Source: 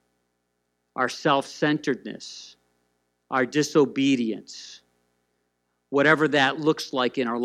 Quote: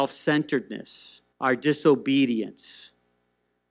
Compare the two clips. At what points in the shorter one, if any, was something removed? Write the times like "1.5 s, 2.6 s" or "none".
1.3 s